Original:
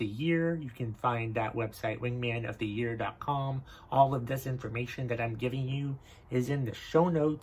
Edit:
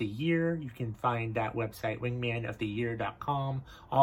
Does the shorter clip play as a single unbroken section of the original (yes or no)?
yes